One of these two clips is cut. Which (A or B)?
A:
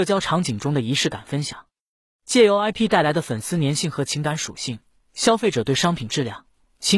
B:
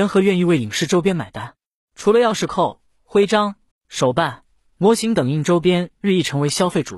B